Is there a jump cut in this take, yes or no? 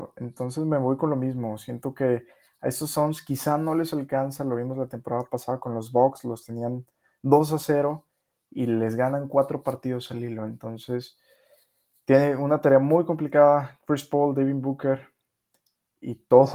no